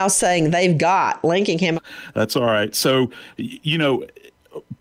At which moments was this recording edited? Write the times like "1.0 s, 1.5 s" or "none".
1.7 s